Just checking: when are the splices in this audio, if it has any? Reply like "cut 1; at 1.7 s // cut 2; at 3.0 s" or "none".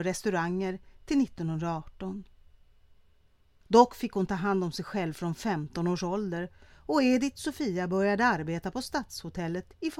cut 1; at 3.6 s